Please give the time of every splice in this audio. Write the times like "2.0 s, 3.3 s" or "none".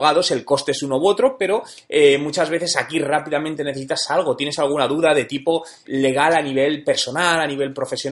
5.8 s